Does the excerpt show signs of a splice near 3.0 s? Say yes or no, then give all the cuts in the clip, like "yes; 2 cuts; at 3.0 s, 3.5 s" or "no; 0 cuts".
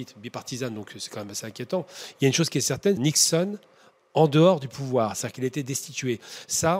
yes; 1 cut; at 3.0 s